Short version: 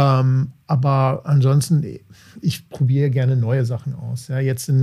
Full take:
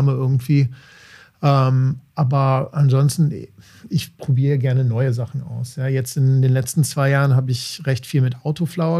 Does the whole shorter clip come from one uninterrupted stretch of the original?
yes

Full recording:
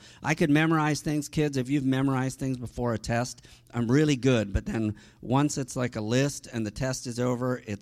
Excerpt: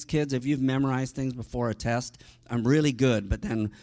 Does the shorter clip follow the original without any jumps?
yes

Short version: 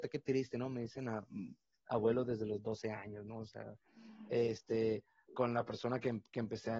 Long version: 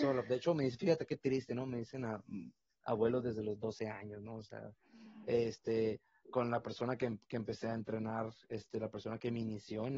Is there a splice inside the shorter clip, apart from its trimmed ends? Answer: no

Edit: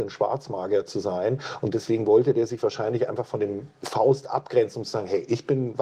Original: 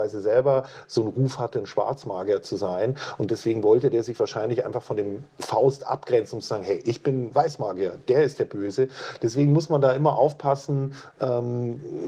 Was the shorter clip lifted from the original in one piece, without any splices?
yes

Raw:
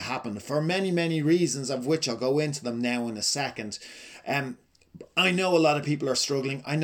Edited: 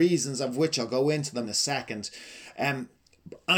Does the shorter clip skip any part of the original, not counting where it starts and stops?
yes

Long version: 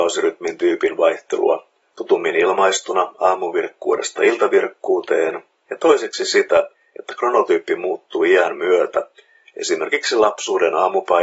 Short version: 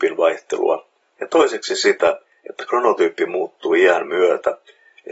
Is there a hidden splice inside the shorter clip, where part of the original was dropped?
yes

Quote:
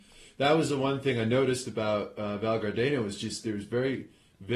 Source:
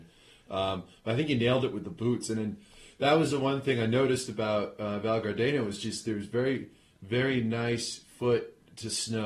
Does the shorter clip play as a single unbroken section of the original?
yes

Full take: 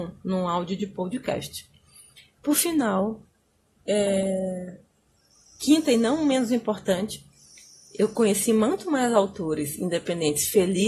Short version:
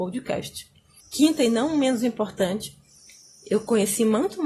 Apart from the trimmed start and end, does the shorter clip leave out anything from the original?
yes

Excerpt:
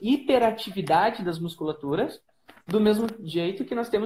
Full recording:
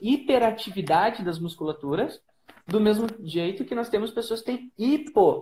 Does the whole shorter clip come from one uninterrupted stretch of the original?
yes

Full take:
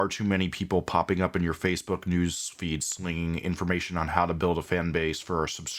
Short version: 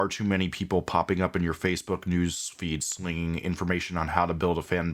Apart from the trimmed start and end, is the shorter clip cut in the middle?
no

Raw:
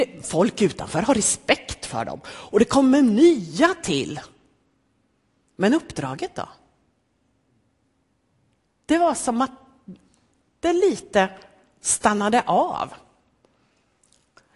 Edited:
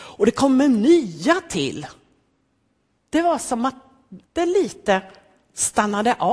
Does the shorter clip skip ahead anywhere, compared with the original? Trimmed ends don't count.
yes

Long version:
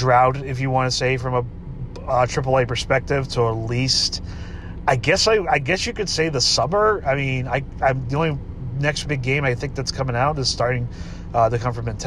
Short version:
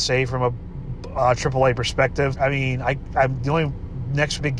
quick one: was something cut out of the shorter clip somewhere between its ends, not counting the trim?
yes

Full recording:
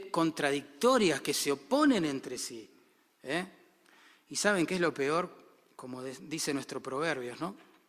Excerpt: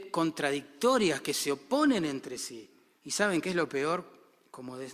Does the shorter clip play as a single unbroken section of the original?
no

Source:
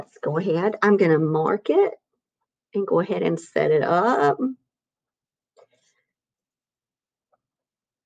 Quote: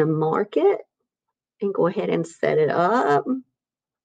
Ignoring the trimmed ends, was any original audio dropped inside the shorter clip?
no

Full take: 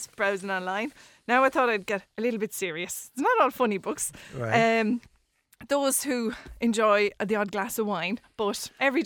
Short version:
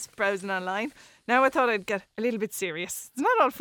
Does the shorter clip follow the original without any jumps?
yes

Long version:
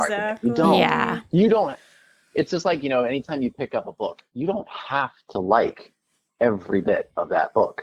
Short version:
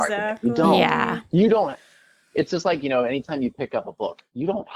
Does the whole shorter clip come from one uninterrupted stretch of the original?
yes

